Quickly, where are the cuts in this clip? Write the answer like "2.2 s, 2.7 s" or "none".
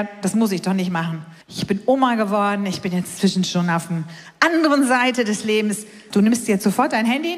1.4 s, 6.1 s